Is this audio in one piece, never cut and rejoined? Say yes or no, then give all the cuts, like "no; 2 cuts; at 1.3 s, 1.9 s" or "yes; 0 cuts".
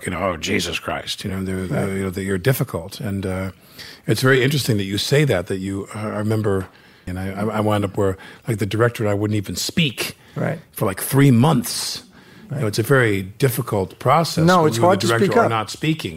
no; 1 cut; at 7.1 s